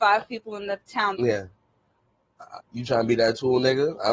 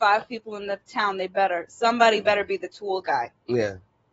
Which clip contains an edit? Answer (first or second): first